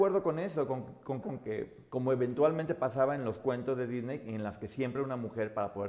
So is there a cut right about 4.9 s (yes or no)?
no